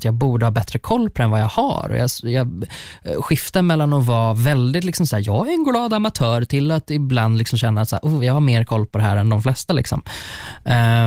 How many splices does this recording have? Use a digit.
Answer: 0